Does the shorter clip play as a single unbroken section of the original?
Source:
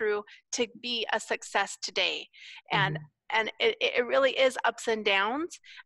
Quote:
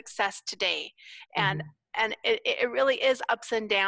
yes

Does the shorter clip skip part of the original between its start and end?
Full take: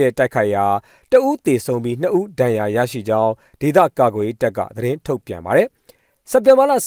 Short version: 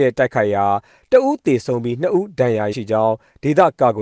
yes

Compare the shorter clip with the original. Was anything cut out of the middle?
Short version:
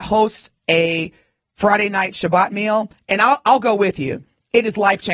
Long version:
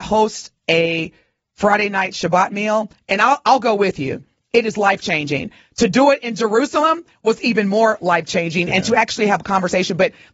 no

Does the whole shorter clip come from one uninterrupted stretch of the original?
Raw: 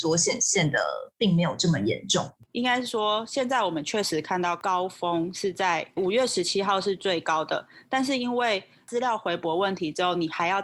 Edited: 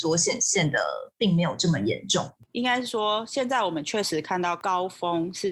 yes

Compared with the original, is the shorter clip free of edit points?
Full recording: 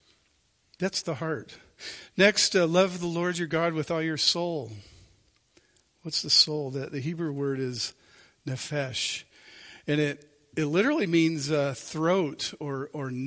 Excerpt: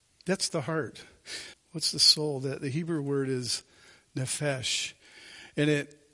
no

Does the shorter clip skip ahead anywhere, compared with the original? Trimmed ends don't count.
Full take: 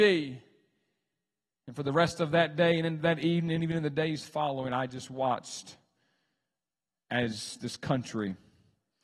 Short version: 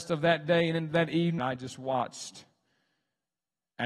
yes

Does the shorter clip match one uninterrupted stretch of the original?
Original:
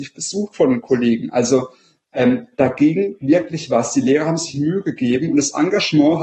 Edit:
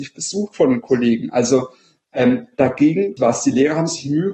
no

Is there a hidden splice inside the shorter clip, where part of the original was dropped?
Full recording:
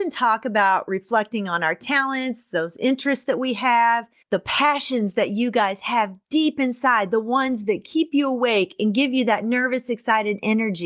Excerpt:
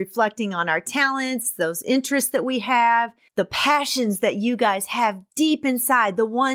no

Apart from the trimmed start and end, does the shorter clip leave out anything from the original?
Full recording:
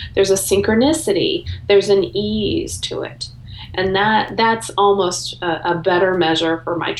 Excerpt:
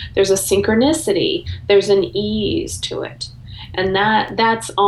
no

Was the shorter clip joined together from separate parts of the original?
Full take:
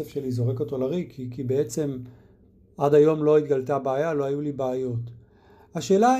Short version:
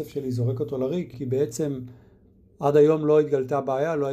yes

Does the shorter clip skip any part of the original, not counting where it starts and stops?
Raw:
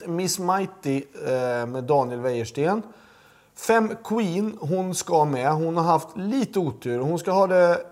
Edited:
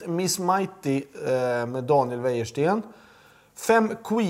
no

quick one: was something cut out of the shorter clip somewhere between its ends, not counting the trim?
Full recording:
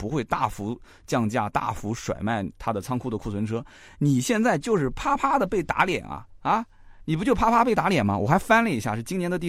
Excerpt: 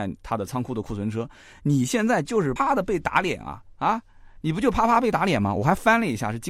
yes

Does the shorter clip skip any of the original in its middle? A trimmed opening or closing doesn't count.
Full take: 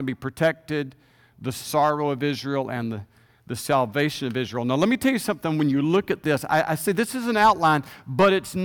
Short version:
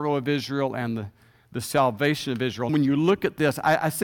yes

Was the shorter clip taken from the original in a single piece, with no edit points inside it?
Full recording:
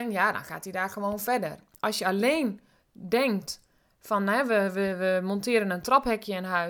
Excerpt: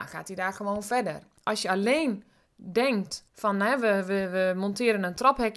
no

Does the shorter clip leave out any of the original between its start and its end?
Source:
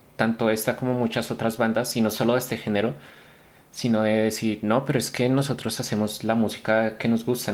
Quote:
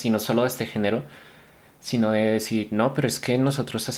no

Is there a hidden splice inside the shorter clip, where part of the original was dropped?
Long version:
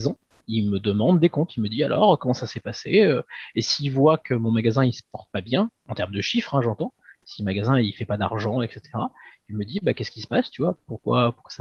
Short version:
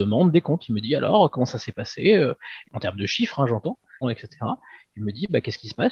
yes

